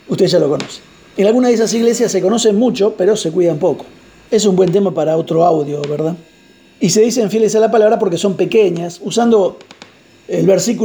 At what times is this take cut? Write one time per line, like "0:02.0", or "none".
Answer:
0:04.3
0:06.6

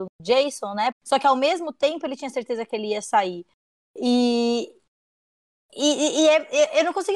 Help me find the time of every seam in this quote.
0:00.9

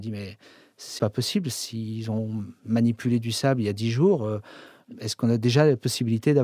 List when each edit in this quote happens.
0:01.0

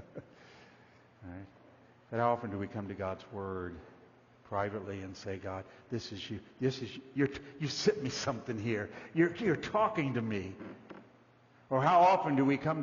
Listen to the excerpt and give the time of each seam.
none

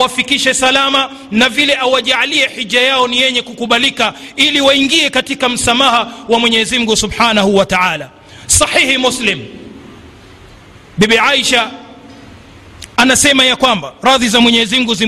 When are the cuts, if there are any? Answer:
0:01.5

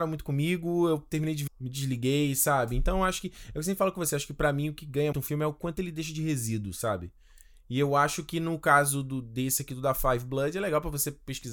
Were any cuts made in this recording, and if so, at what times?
0:01.5
0:05.1

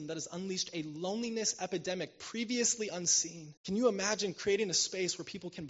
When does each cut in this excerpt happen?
0:03.6

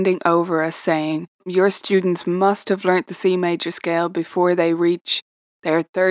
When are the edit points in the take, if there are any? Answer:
none

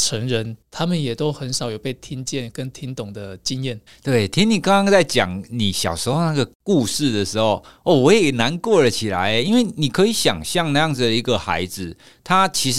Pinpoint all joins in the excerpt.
0:03.9

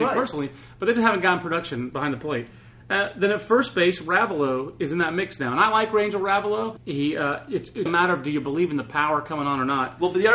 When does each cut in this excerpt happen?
0:06.8
0:07.9

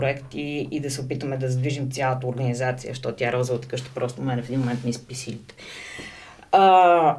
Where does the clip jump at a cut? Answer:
none

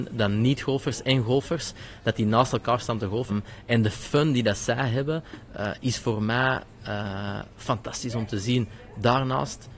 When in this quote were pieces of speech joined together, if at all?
0:03.3

